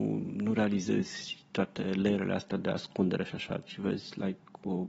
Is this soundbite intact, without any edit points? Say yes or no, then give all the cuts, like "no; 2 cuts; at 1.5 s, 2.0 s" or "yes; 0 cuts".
yes; 0 cuts